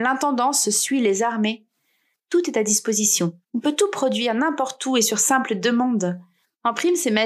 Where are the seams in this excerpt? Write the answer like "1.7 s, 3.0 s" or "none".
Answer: 2.1 s, 3.4 s